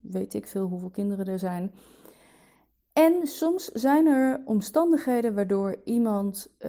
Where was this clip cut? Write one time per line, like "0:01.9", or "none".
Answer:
none